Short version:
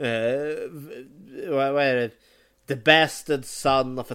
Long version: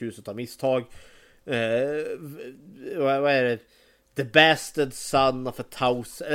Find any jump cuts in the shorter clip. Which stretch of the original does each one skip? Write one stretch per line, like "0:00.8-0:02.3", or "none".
none